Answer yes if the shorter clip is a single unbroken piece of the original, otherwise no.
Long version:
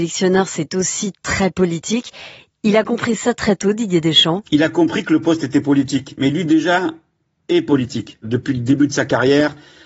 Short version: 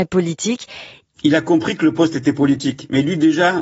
no